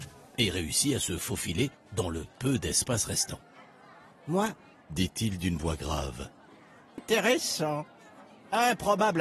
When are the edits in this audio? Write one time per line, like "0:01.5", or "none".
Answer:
0:04.7
0:07.0